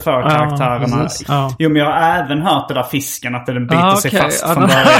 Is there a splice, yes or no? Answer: yes